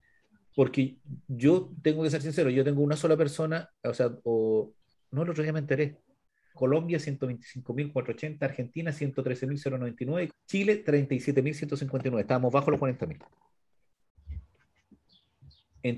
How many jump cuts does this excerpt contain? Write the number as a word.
two